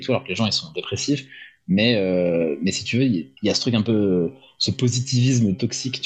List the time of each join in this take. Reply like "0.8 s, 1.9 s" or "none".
3.4 s